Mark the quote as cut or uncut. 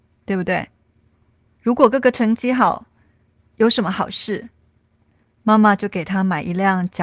uncut